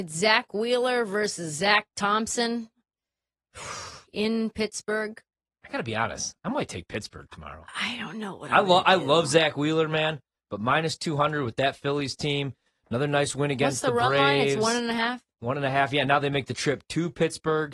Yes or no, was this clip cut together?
no